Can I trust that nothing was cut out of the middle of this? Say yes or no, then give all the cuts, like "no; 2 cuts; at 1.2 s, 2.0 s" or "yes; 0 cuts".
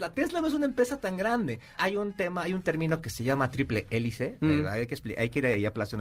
no; 1 cut; at 1.8 s